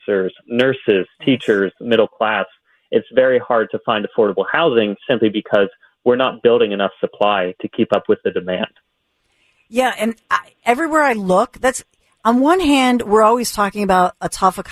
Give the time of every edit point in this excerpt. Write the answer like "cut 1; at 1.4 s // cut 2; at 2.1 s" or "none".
none

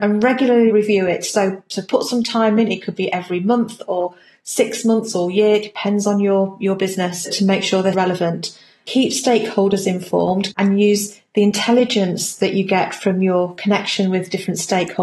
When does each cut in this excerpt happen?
cut 1; at 7.9 s // cut 2; at 10.5 s

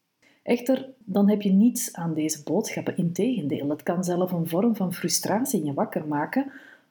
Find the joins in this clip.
cut 1; at 1.0 s

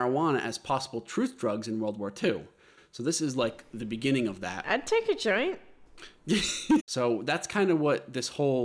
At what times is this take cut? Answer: cut 1; at 6.8 s

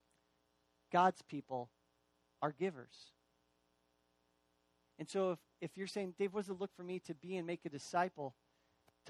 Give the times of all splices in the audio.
cut 1; at 6.7 s

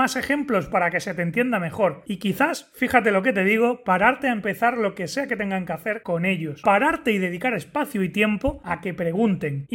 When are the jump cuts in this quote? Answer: none

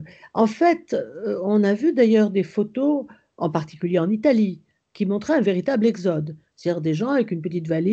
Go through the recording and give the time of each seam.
none

